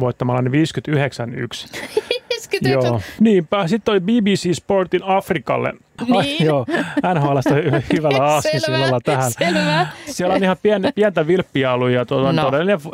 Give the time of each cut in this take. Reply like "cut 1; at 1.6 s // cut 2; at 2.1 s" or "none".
cut 1; at 3.2 s // cut 2; at 6.0 s